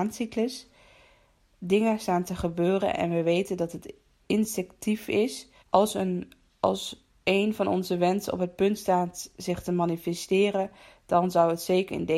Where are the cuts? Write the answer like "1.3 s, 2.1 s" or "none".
4.2 s, 5.6 s